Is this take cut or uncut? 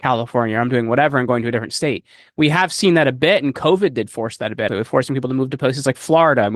cut